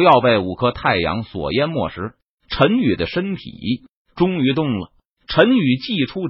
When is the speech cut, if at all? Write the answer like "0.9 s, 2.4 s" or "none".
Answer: 5.2 s